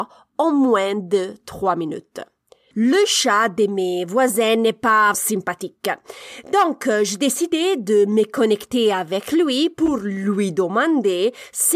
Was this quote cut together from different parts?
yes; 2 cuts; at 2.7 s, 5.1 s

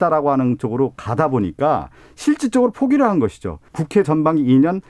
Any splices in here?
yes; 1 cut; at 3.7 s

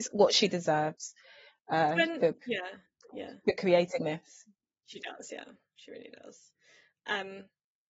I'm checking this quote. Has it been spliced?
yes; 1 cut; at 2.4 s

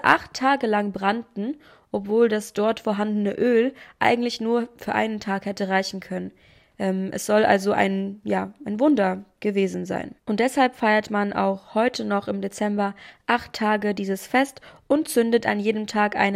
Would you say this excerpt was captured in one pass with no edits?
no; 1 cut; at 10.2 s

